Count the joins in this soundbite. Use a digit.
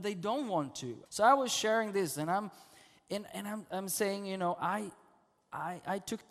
1